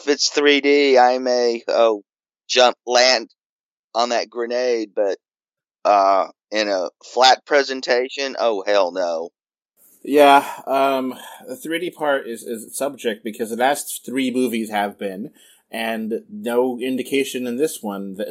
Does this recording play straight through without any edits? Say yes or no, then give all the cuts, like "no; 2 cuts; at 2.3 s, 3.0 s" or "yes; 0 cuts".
yes; 0 cuts